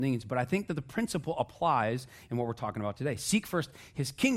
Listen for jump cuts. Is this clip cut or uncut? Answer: uncut